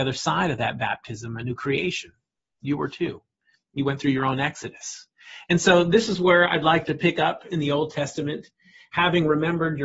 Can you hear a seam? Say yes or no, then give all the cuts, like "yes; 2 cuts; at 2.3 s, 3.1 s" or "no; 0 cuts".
yes; 1 cut; at 6.8 s